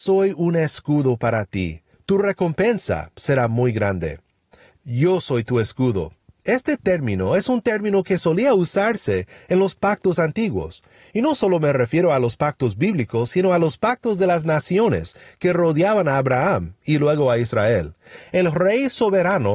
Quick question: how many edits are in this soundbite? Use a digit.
0